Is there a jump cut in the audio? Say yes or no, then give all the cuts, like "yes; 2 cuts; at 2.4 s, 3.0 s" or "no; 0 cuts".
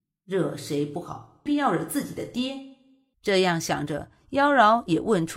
yes; 2 cuts; at 1.5 s, 3.1 s